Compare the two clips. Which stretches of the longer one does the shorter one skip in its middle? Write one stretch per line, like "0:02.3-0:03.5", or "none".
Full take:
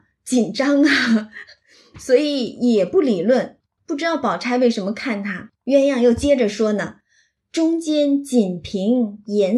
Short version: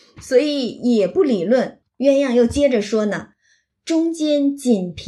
0:03.7-0:05.6